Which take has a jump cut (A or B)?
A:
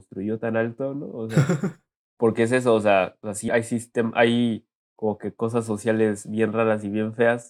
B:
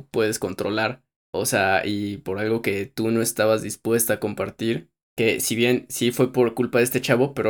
A